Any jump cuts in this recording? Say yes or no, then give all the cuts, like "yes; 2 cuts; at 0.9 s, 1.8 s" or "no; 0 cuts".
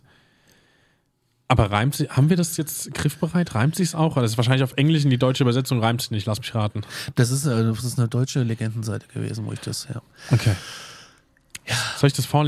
no; 0 cuts